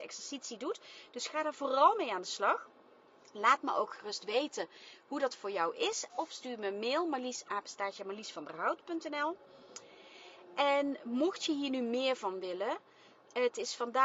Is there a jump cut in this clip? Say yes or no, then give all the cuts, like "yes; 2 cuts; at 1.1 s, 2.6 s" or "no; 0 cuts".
yes; 1 cut; at 6.1 s